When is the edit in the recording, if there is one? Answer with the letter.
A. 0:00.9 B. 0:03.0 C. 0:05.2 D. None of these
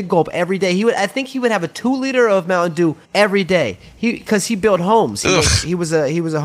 B